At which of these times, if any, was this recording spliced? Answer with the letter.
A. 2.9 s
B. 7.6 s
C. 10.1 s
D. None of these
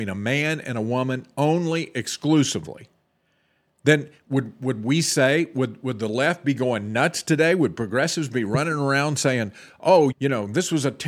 C